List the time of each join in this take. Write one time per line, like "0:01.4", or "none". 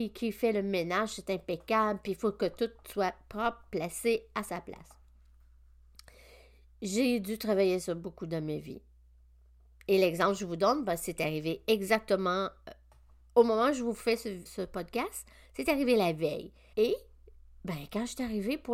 0:14.5
0:16.7

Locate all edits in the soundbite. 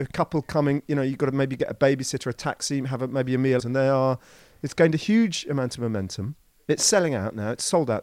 0:03.6

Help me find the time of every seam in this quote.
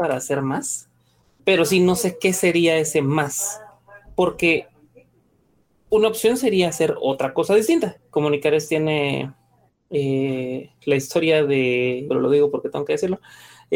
0:08.0
0:12.1

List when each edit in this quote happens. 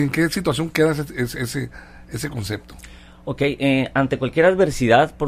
none

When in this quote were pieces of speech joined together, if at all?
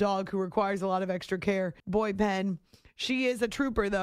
0:01.8

